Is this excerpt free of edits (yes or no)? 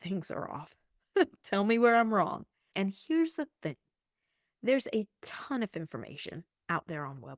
no